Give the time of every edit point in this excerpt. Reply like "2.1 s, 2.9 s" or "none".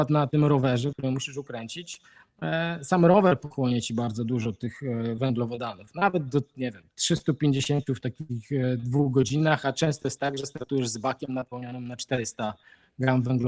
0.9 s